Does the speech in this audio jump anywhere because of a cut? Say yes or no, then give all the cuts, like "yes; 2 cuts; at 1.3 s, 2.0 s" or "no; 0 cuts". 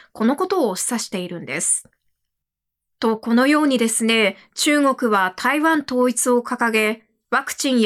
no; 0 cuts